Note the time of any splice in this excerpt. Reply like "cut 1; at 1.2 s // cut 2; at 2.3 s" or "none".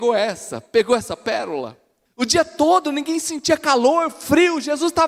cut 1; at 2.1 s